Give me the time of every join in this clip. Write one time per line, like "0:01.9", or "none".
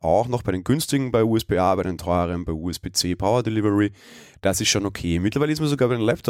none

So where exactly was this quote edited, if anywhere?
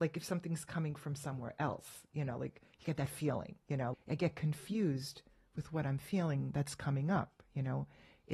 0:03.9

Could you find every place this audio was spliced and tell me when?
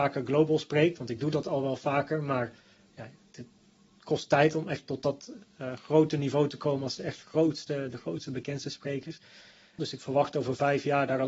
0:09.8

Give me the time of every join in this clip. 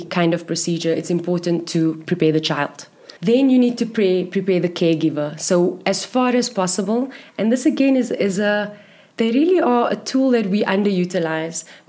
0:03.2

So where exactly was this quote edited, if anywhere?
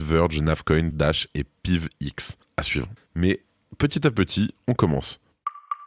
0:00.9
0:03.0

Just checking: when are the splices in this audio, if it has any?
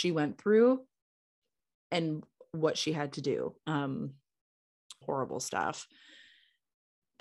0:03.6
0:05.0

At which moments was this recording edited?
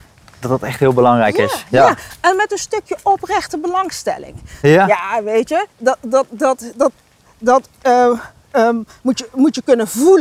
0:04.6

